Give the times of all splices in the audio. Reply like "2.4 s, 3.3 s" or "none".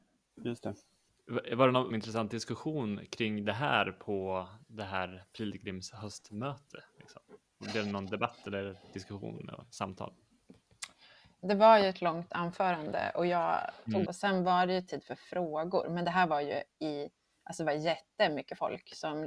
1.9 s, 11.4 s, 14.0 s